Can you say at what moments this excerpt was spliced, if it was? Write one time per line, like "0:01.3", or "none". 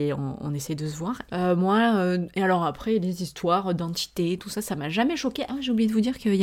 0:01.3
0:05.5